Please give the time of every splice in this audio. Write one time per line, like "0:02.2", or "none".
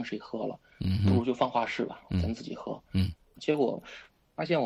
0:03.3